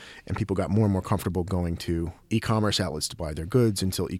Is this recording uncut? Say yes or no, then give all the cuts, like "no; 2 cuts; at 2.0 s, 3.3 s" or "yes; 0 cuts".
no; 1 cut; at 2.2 s